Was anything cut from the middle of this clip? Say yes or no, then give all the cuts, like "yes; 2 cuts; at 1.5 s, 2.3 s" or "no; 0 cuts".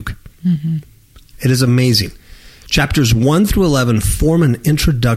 no; 0 cuts